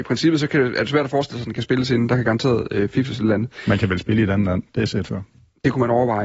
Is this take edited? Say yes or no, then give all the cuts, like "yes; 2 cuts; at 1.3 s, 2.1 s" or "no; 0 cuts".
no; 0 cuts